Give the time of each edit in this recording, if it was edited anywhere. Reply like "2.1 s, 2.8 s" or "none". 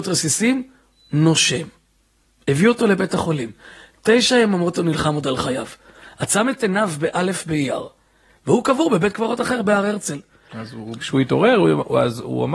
11.0 s